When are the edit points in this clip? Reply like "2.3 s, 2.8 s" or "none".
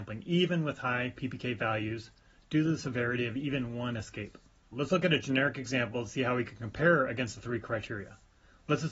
4.7 s

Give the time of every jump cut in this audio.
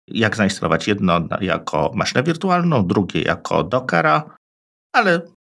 none

